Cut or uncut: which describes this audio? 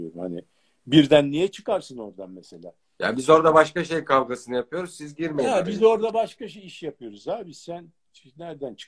uncut